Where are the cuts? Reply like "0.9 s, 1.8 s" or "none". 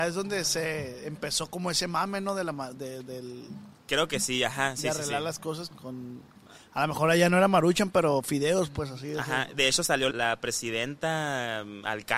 5.7 s, 10.1 s